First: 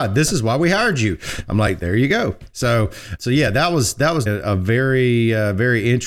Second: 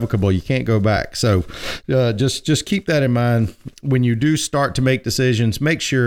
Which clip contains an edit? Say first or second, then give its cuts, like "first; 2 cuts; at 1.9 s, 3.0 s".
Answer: first; 2 cuts; at 3.2 s, 4.3 s